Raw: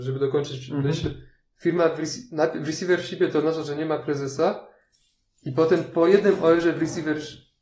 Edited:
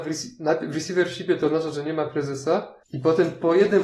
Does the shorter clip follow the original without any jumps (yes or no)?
no